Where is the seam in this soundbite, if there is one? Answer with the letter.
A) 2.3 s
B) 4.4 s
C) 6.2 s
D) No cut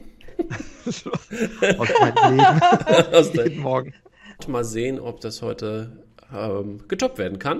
B